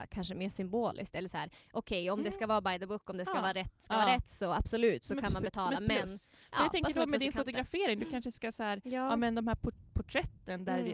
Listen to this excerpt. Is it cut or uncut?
uncut